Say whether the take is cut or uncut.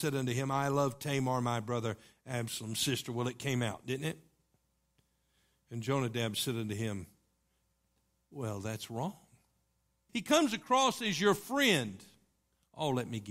cut